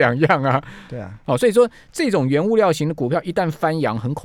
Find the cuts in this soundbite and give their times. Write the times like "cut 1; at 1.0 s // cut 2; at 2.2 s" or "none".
none